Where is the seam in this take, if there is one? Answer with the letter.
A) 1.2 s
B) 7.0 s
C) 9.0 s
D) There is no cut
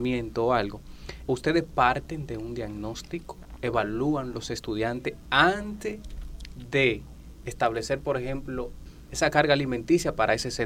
A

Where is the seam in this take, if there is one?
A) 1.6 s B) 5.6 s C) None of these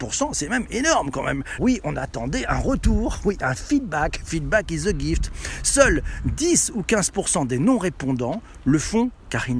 A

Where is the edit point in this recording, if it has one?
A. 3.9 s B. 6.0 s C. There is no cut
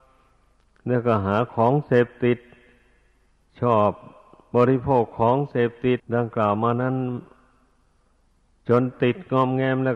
B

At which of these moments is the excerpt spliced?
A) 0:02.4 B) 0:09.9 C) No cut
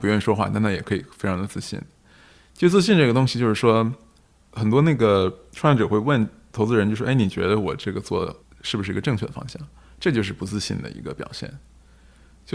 C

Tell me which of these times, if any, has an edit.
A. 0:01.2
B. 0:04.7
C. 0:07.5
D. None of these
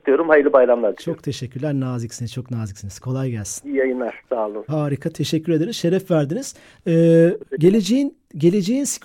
B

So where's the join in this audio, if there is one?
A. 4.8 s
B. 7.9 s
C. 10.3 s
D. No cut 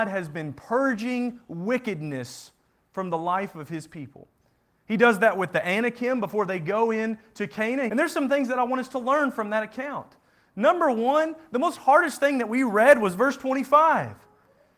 B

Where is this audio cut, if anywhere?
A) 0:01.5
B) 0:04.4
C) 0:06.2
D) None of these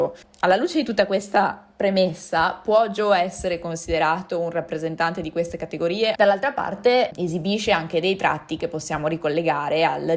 C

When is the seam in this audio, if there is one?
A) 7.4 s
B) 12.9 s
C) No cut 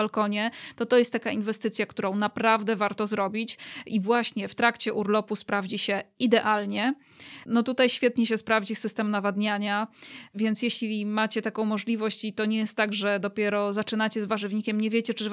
A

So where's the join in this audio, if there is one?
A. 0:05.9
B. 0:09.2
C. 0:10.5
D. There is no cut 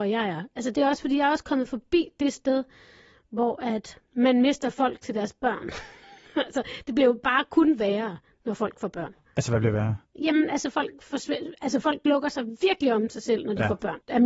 D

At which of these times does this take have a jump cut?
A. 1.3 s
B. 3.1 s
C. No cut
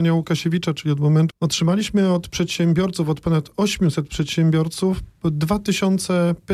A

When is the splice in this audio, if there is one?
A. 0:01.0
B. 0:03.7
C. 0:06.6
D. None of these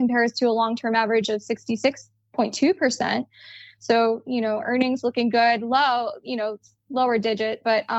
D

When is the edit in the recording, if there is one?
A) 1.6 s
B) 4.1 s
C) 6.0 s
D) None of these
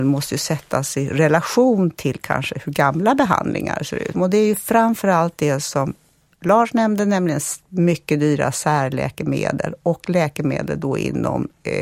B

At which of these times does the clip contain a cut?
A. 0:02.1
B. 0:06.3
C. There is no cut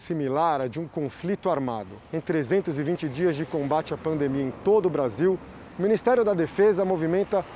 A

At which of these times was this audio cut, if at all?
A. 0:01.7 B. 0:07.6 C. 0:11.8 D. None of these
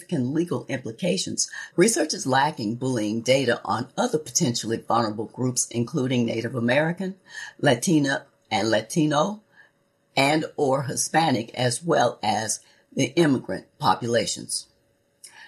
A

